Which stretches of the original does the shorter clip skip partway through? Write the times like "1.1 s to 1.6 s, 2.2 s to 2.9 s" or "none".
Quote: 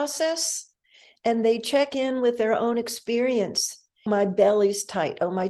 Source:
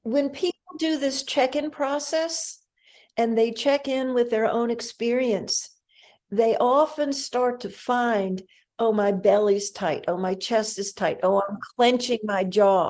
6.0 s to 8.9 s